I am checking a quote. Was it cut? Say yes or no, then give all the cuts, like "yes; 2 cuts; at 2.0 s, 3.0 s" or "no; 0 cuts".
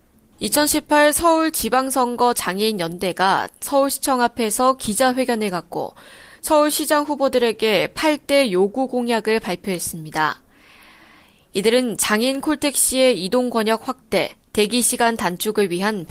no; 0 cuts